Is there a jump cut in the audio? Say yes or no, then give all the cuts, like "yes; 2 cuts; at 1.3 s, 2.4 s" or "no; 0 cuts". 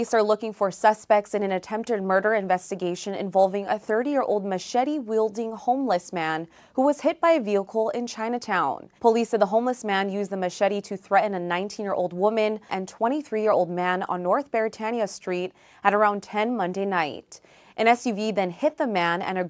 yes; 2 cuts; at 9.0 s, 12.7 s